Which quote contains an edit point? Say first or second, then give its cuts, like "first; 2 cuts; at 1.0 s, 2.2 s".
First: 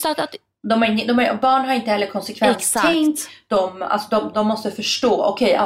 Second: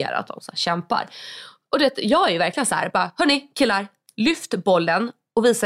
first; 1 cut; at 4.3 s